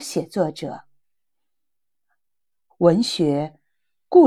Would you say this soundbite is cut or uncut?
cut